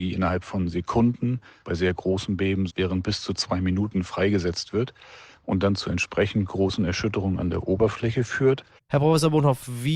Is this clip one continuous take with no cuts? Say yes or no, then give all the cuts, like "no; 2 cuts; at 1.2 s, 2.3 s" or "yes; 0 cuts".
no; 2 cuts; at 2.7 s, 8.8 s